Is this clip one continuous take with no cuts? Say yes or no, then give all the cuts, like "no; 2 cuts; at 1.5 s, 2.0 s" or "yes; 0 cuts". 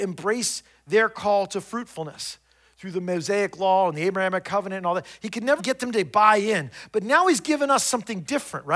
no; 1 cut; at 5.6 s